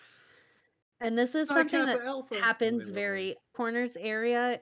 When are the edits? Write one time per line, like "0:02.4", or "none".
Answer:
0:03.5